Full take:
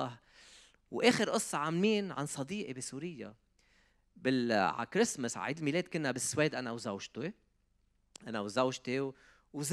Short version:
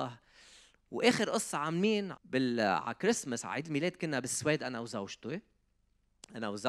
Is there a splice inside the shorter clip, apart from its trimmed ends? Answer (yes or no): yes